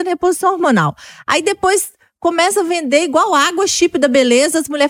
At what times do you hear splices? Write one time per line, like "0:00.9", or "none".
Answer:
none